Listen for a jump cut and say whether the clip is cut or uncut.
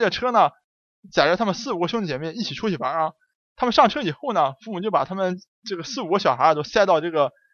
uncut